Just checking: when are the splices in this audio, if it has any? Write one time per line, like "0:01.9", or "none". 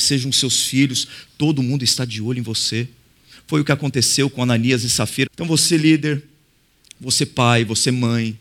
0:05.3